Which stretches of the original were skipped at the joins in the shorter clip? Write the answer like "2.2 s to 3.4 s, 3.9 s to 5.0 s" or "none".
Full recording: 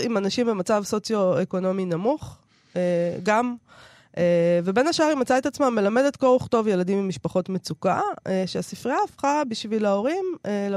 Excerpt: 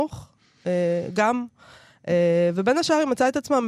none